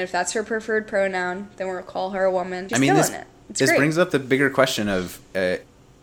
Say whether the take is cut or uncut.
cut